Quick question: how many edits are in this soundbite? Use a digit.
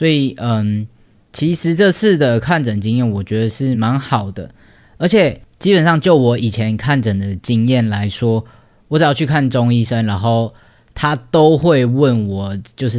1